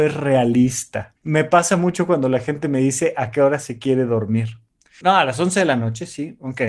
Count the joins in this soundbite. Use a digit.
2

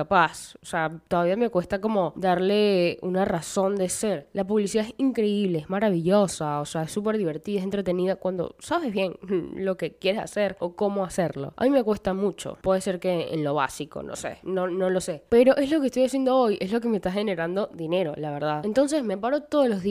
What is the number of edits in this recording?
1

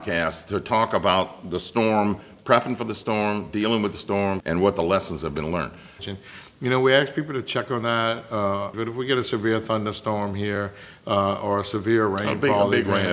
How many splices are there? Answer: 3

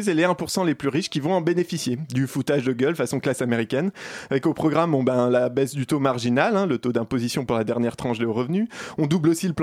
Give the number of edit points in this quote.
0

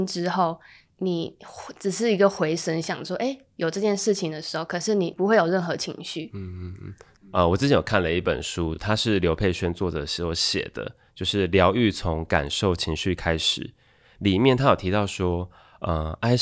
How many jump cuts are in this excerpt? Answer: 0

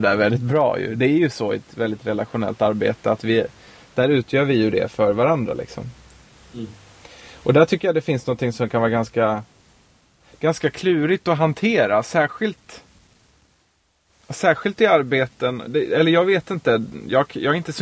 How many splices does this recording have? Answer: 1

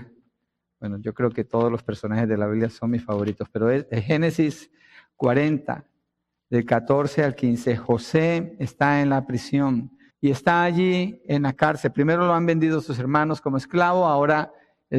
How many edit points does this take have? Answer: 1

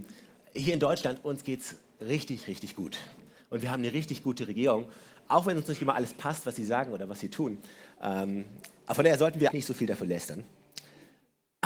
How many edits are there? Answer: 1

